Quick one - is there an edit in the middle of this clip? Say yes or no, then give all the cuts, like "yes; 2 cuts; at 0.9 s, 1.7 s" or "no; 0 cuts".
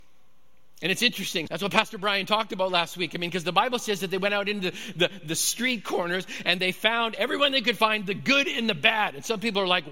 yes; 1 cut; at 1.5 s